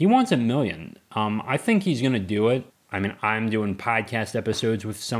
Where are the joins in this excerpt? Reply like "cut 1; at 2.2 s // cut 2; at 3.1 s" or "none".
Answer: cut 1; at 2.7 s